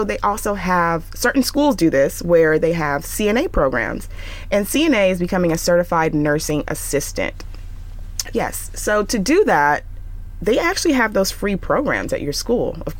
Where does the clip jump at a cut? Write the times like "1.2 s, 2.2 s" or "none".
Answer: 8.3 s